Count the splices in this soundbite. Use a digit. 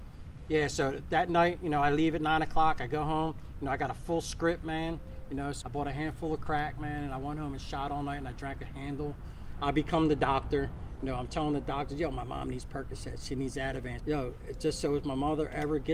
3